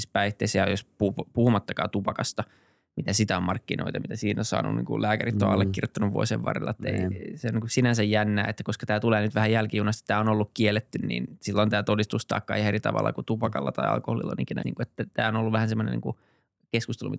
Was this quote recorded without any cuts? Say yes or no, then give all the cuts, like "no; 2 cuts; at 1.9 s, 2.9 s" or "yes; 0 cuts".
no; 1 cut; at 14.6 s